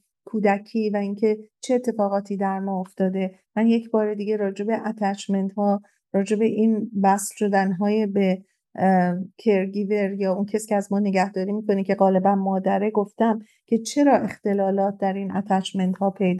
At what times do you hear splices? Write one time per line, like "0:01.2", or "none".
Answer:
none